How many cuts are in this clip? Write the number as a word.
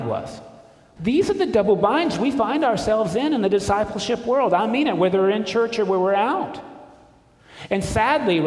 one